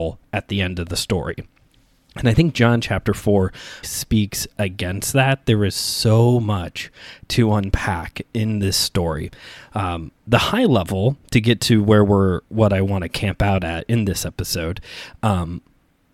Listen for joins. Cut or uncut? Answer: cut